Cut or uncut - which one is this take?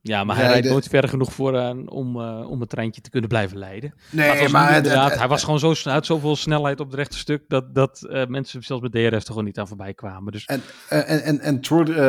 uncut